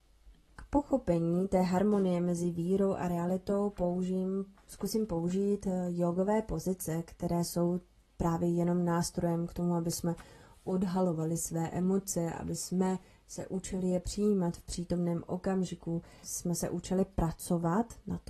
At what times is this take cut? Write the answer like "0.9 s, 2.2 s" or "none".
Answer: 4.6 s, 16.2 s